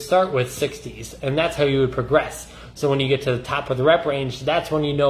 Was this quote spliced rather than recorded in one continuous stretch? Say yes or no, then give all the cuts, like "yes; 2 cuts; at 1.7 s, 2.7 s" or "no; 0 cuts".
no; 0 cuts